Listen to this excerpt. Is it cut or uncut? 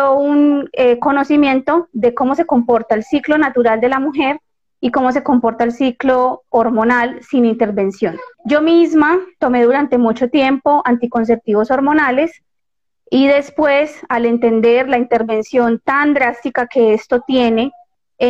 cut